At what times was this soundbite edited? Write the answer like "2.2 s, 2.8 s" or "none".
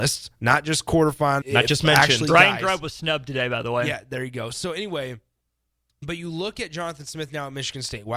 1.4 s